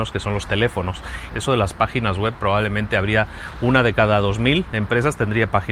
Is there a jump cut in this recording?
yes; 1 cut; at 1.3 s

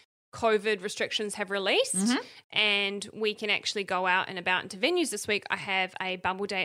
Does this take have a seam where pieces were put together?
no; 0 cuts

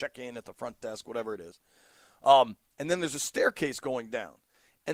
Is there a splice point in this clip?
no; 0 cuts

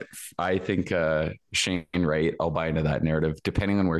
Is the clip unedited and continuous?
yes; 0 cuts

